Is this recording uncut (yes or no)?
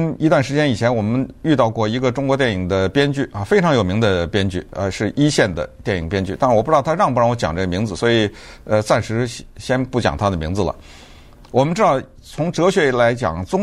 no